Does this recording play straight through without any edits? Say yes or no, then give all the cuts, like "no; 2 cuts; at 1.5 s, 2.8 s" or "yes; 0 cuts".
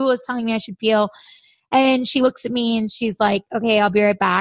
yes; 0 cuts